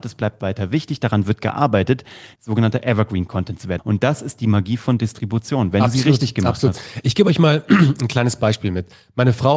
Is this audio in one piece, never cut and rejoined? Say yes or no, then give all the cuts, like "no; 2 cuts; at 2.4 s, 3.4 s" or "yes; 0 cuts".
no; 2 cuts; at 2.4 s, 3.8 s